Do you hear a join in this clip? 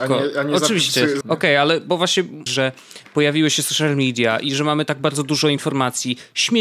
yes; 2 cuts; at 1.2 s, 2.5 s

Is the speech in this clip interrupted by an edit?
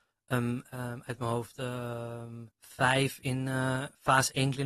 yes; 1 cut; at 2.5 s

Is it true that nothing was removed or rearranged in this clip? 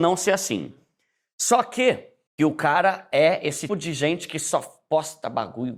no; 2 cuts; at 2.3 s, 3.7 s

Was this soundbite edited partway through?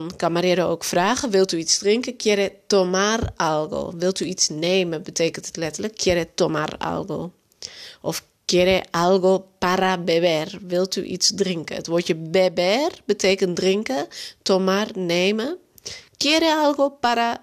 no; 0 cuts

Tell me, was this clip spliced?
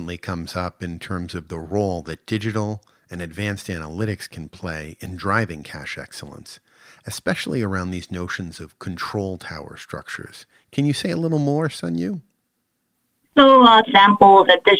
no; 0 cuts

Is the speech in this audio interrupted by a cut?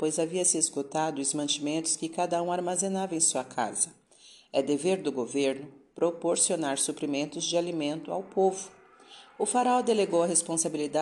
no; 0 cuts

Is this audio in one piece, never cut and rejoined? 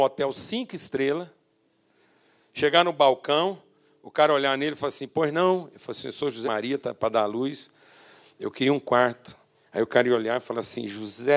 no; 1 cut; at 6.4 s

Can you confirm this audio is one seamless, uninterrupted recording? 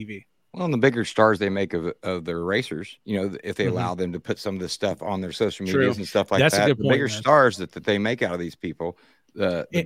yes; 0 cuts

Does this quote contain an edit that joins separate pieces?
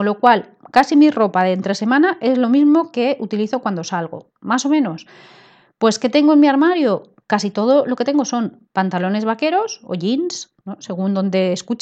no; 0 cuts

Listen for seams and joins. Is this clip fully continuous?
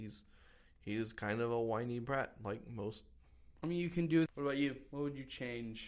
no; 1 cut; at 4.3 s

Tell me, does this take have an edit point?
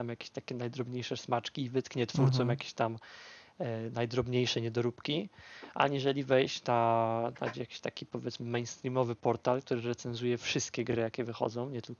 no; 0 cuts

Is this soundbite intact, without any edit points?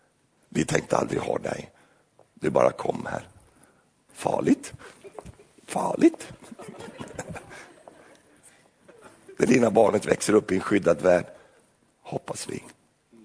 no; 1 cut; at 4.1 s

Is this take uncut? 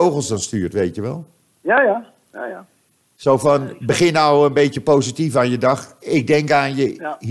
yes; 0 cuts

